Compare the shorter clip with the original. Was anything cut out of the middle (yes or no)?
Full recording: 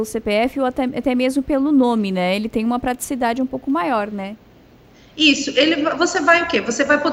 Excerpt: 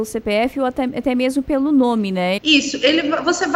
yes